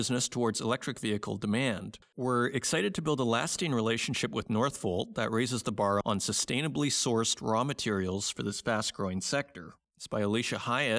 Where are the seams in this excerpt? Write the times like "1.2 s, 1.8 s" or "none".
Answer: 9.8 s